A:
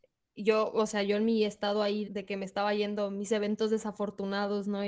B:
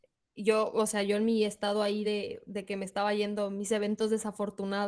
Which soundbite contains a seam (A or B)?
A